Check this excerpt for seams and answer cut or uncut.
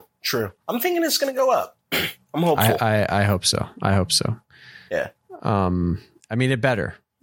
uncut